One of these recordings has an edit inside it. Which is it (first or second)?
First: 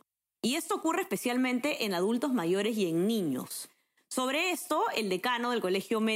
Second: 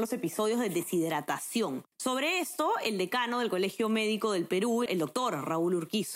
second